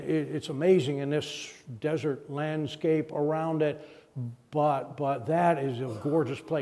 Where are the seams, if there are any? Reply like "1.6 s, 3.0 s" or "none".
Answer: none